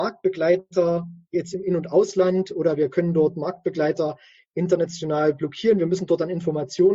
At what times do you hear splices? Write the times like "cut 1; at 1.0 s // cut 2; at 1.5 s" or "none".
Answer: none